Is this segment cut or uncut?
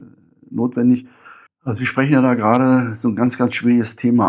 cut